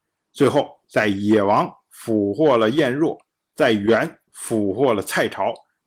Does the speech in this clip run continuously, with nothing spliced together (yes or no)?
yes